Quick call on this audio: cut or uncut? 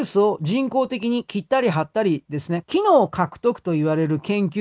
cut